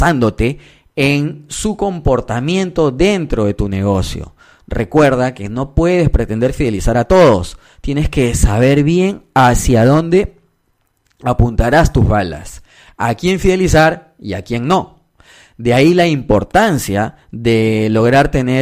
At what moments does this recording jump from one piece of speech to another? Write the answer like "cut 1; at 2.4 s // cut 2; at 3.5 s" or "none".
none